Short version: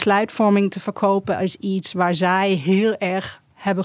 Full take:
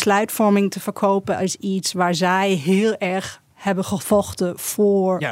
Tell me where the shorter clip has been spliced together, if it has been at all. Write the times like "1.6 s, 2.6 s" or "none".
none